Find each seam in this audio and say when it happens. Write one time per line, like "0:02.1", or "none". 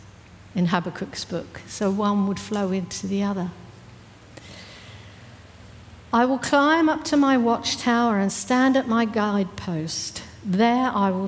none